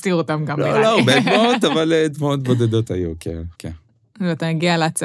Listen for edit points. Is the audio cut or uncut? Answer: cut